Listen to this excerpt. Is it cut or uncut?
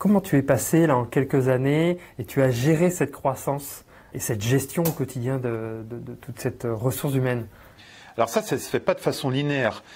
cut